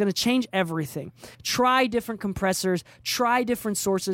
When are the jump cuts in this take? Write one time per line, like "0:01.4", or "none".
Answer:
0:01.3